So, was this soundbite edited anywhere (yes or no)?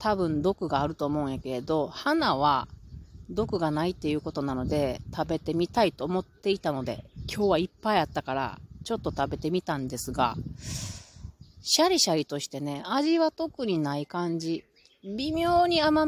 no